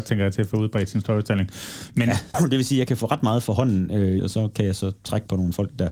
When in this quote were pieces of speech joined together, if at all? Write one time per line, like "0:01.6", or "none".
0:02.3
0:04.2